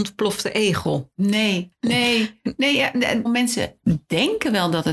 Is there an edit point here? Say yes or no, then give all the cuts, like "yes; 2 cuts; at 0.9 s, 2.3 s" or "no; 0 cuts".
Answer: yes; 1 cut; at 3.2 s